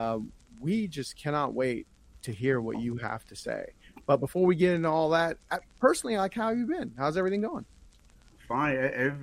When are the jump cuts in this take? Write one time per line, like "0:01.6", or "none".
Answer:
none